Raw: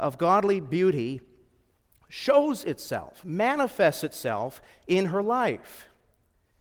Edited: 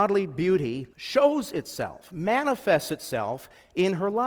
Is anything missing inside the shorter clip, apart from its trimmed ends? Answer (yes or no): yes